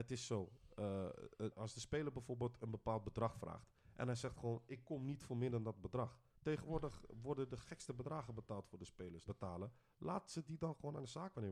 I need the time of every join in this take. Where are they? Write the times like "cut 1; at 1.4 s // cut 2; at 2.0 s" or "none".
cut 1; at 1.5 s // cut 2; at 6.4 s // cut 3; at 9.3 s